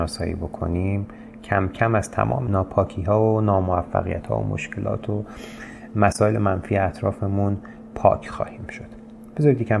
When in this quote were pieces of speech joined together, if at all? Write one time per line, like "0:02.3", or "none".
none